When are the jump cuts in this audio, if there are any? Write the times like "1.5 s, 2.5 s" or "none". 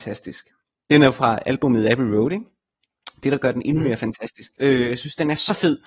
4.5 s